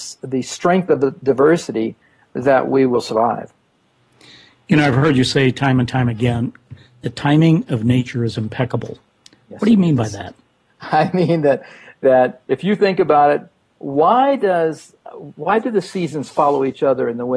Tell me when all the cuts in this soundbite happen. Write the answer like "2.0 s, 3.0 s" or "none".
none